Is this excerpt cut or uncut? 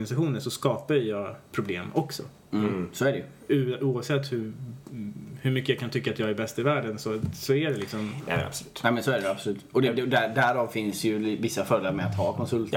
uncut